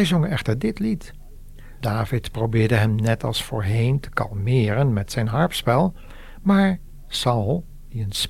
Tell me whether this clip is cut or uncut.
cut